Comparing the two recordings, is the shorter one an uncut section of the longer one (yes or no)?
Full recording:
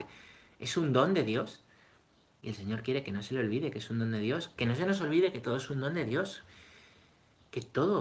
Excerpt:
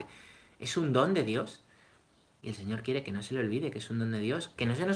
yes